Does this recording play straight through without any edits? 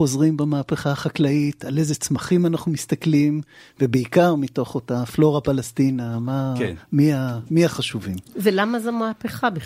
yes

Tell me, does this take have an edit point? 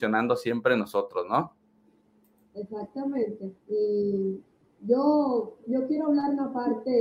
yes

